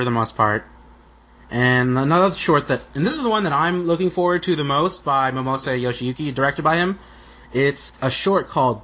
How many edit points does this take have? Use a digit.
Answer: 0